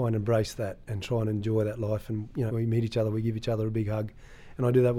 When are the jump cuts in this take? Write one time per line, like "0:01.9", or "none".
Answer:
0:02.5

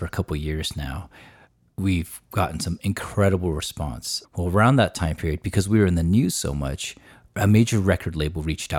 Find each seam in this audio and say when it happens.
0:04.2

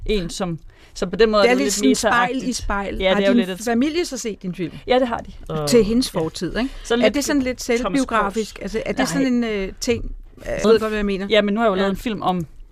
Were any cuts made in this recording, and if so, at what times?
0:05.4
0:10.6

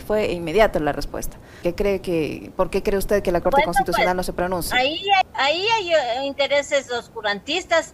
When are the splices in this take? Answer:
0:01.6
0:05.2

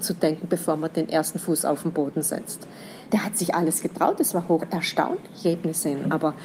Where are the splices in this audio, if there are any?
0:03.1
0:05.4

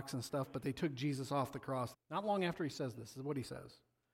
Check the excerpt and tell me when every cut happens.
0:01.9

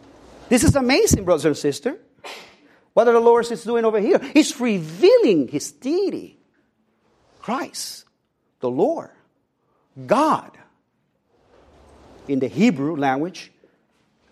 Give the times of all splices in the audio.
none

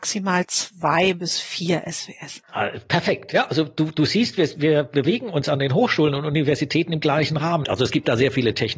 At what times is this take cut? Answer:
0:04.5
0:07.6

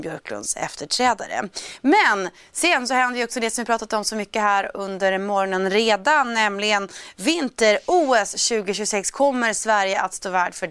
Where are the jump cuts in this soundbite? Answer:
none

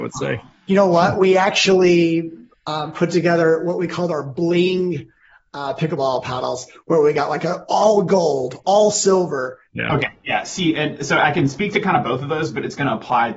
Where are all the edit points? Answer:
0:09.7

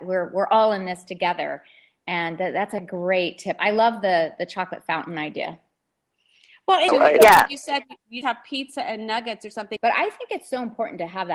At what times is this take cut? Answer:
0:06.9
0:08.2
0:09.8

